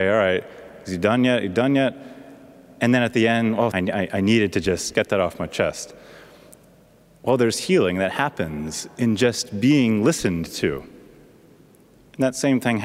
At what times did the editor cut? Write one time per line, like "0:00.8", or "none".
0:03.7